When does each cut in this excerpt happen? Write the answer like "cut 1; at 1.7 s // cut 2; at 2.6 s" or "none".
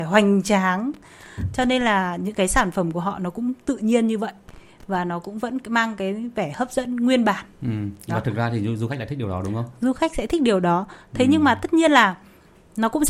none